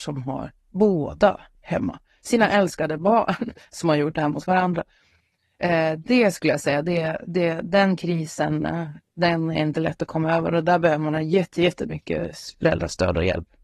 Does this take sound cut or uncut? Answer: cut